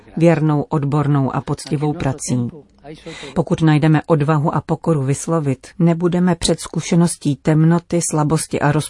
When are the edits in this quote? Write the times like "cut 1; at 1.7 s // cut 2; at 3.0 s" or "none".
cut 1; at 3.3 s // cut 2; at 5.7 s